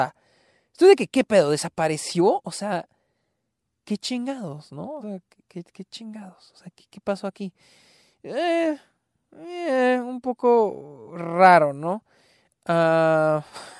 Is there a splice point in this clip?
no; 0 cuts

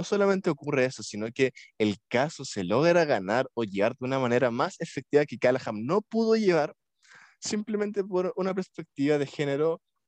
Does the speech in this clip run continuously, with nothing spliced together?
yes; 0 cuts

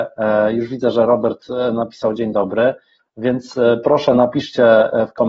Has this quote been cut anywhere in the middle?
yes; 1 cut; at 3.0 s

